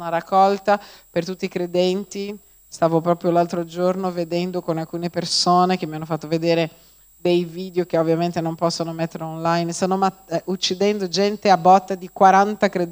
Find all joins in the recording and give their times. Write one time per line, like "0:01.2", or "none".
none